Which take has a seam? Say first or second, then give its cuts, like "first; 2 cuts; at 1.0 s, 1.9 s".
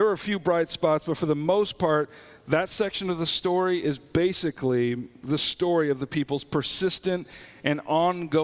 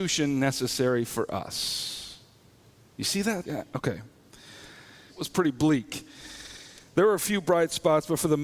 second; 2 cuts; at 3.4 s, 5.1 s